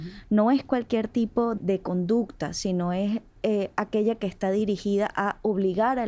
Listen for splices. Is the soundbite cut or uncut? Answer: cut